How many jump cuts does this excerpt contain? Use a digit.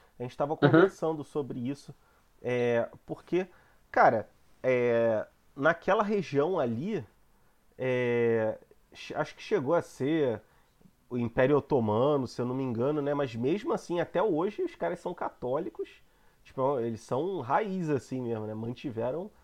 0